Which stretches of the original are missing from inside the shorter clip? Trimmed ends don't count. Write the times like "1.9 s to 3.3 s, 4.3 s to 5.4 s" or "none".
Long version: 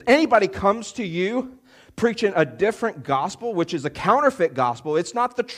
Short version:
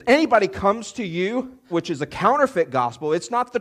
1.7 s to 3.5 s